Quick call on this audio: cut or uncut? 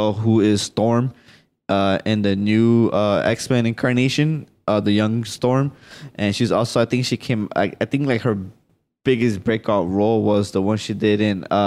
uncut